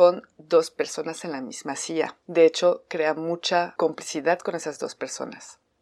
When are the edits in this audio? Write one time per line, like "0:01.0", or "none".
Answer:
none